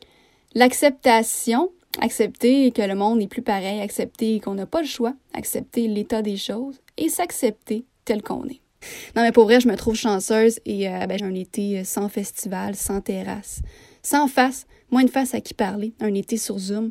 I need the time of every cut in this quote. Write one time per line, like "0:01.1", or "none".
0:08.8
0:11.2